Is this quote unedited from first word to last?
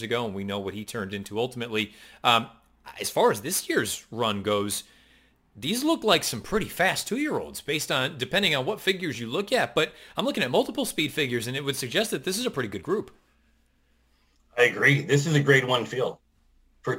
yes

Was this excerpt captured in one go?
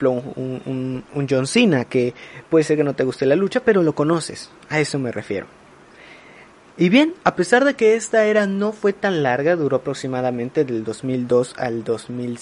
yes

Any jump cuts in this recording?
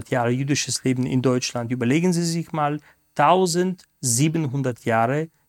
no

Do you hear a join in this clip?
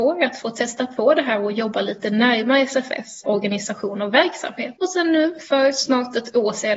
yes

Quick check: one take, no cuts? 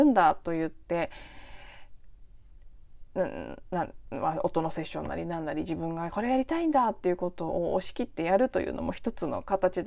yes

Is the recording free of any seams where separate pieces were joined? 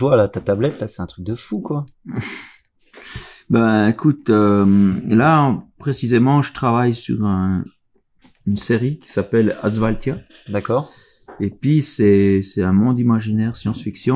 yes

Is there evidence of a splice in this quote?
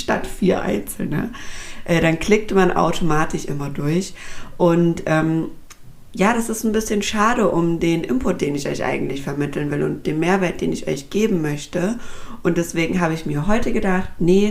no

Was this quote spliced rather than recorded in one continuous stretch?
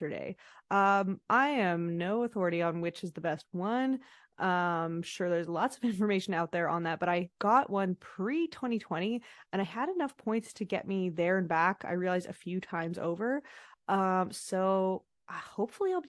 no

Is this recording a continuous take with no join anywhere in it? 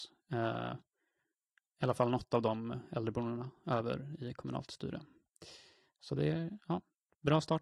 yes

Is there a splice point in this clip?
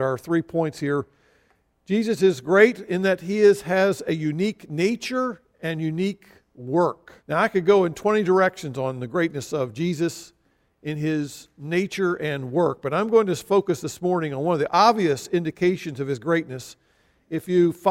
yes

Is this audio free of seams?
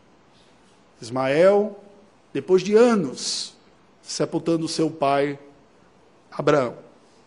no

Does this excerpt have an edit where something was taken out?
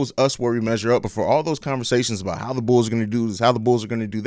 no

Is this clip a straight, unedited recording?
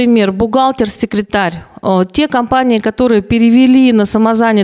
yes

